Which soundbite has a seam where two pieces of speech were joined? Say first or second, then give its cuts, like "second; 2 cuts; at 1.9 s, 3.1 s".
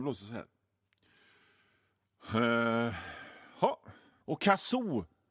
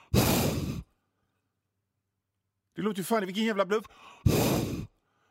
first; 1 cut; at 4.2 s